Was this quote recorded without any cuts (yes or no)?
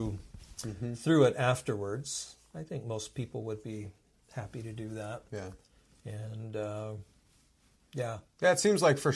yes